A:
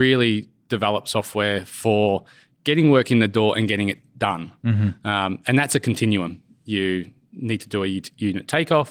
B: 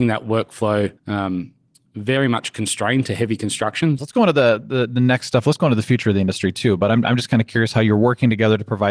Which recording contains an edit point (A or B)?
B